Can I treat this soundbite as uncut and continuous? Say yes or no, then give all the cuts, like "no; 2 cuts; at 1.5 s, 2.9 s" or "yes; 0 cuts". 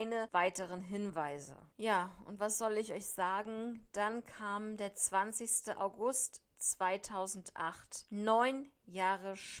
yes; 0 cuts